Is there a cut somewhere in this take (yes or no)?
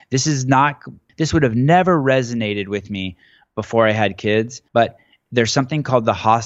yes